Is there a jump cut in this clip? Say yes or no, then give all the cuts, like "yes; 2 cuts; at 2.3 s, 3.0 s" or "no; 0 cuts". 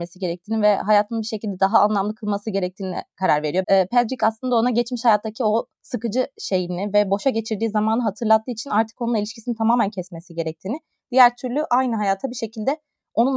yes; 1 cut; at 3.6 s